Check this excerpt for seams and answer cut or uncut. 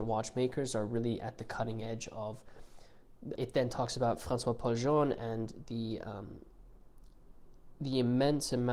cut